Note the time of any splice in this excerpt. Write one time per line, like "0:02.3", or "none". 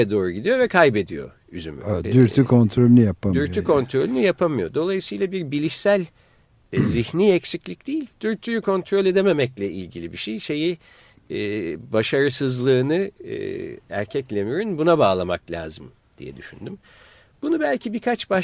none